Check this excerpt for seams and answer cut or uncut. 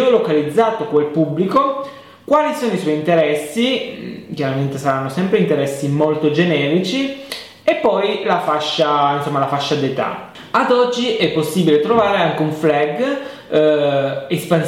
uncut